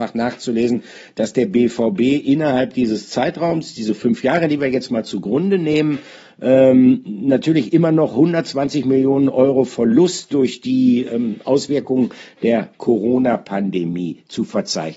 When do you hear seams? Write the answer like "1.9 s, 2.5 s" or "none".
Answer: none